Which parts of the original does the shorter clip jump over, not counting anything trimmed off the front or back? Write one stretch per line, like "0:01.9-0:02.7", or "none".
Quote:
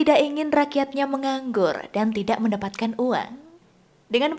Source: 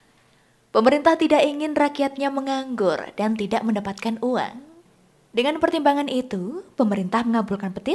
none